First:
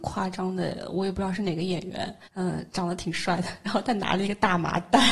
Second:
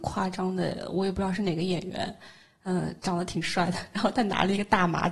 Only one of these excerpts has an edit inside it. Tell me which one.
first; 1 cut; at 2.2 s

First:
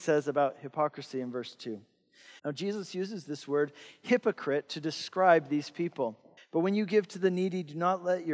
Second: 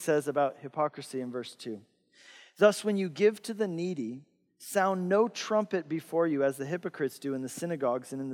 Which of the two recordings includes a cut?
first; 2 cuts; at 2.4 s, 6.4 s

